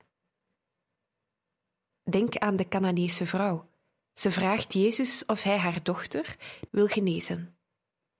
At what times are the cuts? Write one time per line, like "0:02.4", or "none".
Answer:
0:04.0
0:06.7